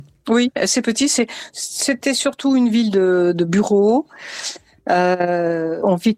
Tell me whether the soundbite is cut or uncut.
uncut